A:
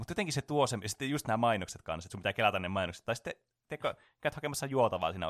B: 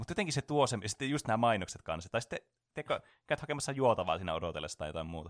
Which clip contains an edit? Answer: B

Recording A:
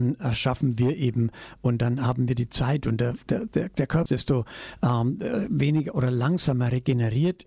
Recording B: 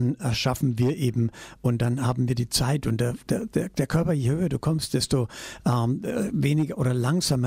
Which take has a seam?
A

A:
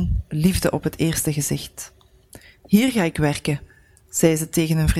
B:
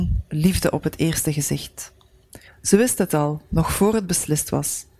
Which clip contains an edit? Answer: B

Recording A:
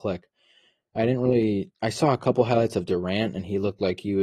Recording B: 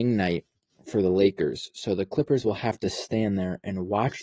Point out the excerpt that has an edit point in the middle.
A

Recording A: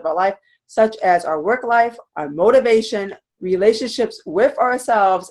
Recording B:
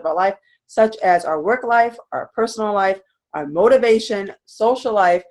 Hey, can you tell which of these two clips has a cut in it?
A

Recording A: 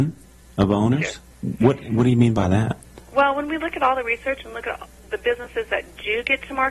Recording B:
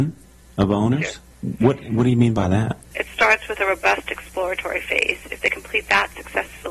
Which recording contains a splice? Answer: B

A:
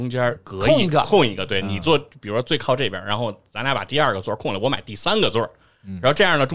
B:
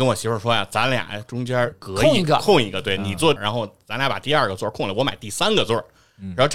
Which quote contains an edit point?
B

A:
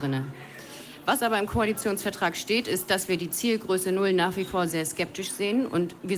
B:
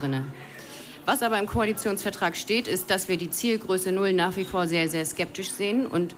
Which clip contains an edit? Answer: A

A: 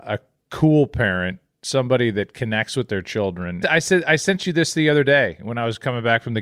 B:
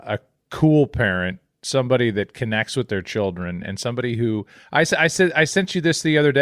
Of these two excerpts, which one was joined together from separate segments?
A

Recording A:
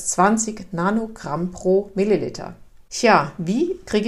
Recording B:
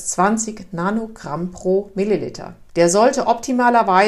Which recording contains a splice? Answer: B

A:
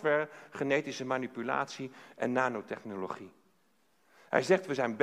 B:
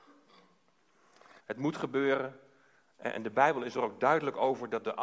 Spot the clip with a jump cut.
B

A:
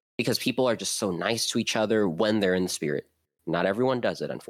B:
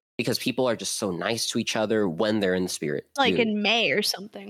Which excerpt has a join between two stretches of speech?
B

